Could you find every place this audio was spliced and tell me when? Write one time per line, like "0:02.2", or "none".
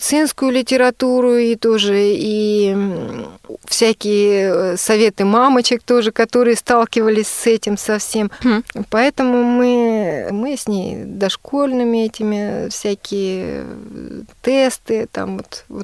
0:08.4
0:10.3